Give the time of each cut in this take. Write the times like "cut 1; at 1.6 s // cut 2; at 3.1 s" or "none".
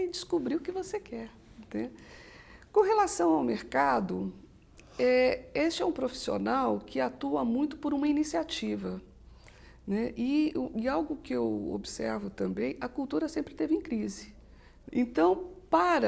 cut 1; at 14.9 s